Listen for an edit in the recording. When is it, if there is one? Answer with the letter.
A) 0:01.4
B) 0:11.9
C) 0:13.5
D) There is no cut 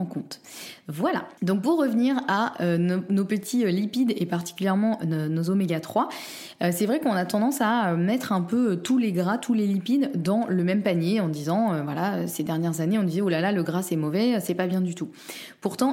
D